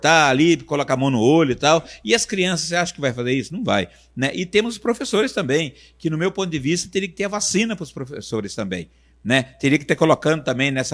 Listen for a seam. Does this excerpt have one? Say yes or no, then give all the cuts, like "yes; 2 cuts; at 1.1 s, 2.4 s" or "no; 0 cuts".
no; 0 cuts